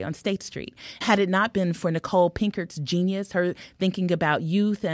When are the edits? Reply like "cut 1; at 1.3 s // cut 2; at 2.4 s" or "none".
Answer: cut 1; at 1.0 s